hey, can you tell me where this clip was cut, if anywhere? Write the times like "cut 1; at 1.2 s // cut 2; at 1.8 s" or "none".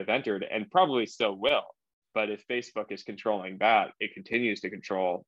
none